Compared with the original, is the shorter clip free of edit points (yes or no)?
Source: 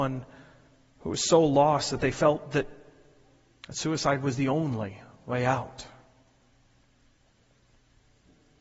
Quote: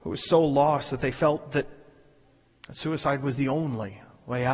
yes